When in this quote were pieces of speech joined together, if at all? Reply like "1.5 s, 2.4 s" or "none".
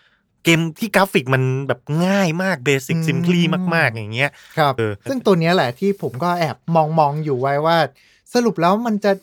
4.8 s